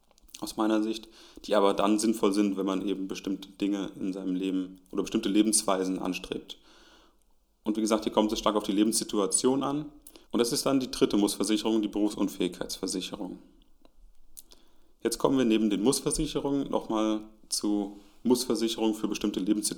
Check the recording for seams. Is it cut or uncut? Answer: cut